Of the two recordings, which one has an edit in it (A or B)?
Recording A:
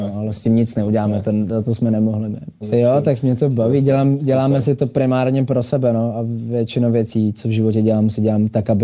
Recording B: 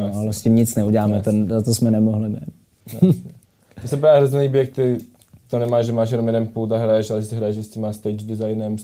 A